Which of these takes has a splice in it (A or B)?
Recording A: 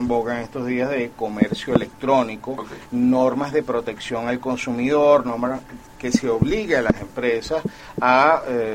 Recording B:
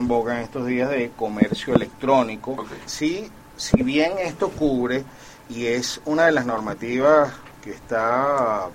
B